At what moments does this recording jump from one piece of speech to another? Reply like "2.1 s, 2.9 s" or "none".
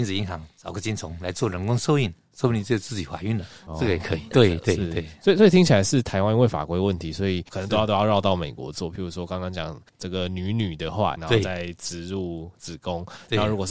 4.3 s, 11.2 s